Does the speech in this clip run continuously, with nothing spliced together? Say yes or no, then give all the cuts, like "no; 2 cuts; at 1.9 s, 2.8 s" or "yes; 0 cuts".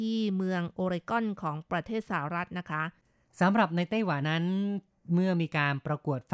no; 1 cut; at 4.2 s